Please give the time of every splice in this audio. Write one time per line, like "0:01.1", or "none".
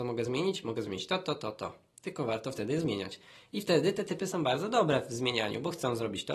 none